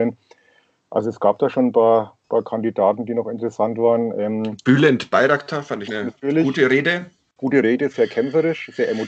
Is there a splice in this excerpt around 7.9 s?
no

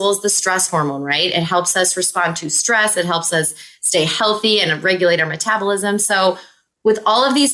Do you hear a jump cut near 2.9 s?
no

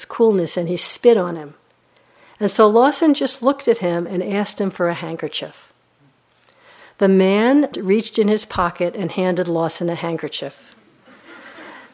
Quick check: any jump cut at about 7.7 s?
yes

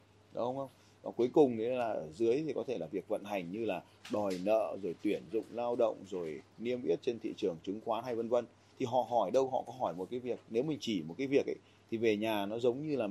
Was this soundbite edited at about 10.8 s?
yes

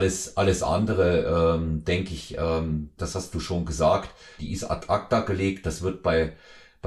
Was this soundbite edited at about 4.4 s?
yes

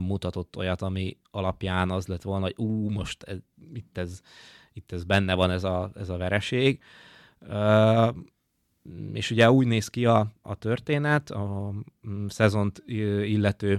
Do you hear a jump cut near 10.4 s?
yes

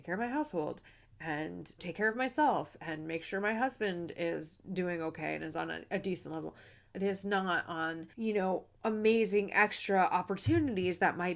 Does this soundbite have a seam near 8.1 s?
yes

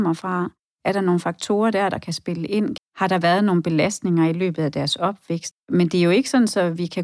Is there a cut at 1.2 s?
no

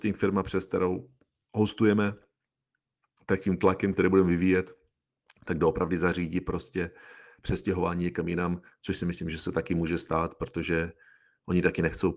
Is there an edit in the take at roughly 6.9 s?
no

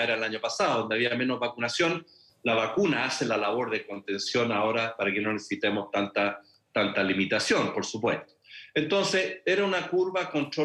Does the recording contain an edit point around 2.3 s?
yes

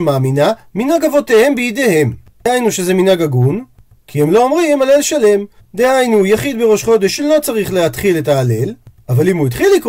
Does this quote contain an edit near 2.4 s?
no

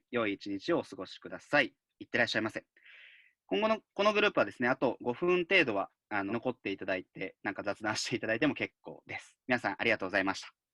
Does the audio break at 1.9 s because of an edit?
no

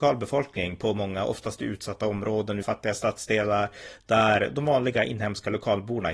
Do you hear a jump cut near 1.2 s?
no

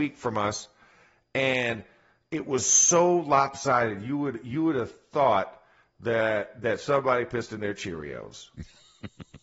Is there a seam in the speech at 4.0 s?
no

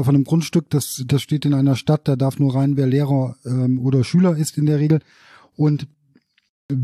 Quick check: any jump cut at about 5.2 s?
no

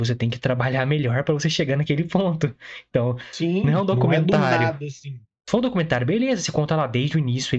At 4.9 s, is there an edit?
no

